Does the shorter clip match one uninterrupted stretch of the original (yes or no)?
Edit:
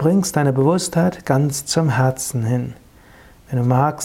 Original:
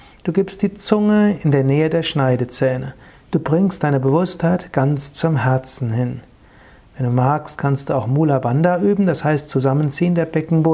yes